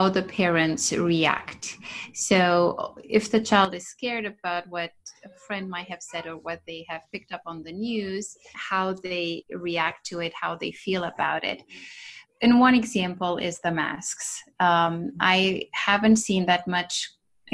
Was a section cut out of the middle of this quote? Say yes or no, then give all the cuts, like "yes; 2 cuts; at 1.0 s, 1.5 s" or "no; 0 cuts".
yes; 1 cut; at 8.5 s